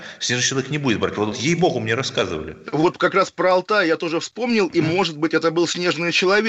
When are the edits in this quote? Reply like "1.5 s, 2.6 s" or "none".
1.3 s

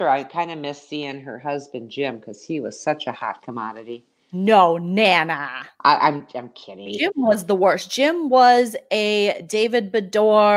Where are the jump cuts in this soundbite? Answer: 6.9 s

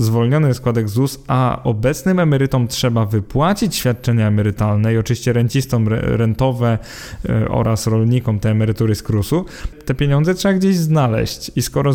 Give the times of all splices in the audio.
9.7 s

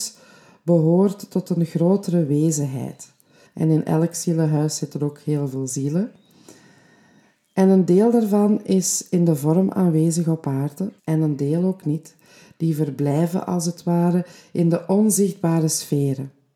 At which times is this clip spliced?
3.5 s, 11.0 s

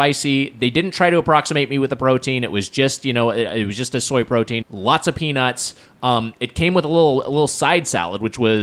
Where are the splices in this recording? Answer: 4.6 s

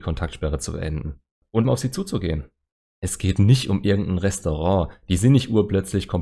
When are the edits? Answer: 1.6 s

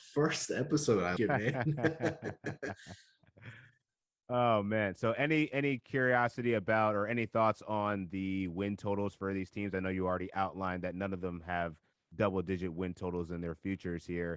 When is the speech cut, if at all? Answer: 1.2 s

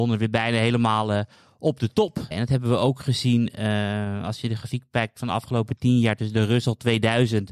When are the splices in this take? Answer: 2.3 s

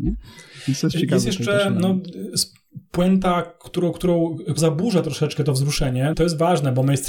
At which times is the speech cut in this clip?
4.6 s, 6.1 s

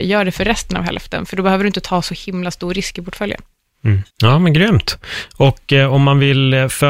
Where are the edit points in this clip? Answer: 4.1 s

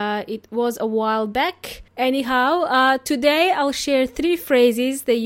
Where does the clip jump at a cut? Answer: 1.9 s

